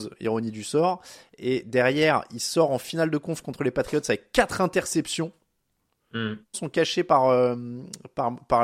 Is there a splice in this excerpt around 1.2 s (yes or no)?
no